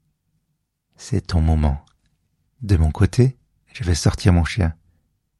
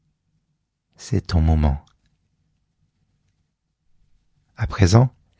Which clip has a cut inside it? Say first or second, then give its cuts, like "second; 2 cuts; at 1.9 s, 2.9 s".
first; 1 cut; at 2.5 s